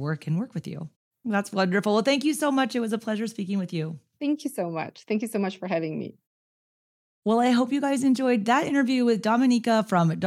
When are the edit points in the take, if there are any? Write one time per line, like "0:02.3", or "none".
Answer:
0:01.1